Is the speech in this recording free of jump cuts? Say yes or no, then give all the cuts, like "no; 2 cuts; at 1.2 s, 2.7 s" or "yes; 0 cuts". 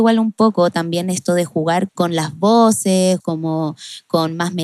no; 2 cuts; at 1.9 s, 3.2 s